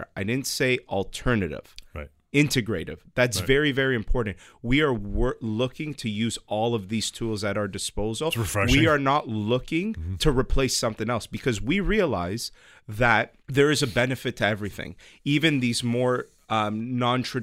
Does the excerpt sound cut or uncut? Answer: cut